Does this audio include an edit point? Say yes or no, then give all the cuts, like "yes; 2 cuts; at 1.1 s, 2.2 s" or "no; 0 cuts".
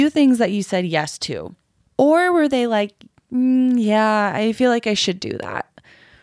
yes; 1 cut; at 1.9 s